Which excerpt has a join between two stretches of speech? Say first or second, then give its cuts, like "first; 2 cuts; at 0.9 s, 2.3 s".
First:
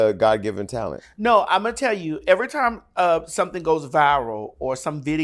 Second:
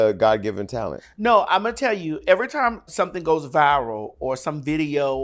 second; 1 cut; at 2.9 s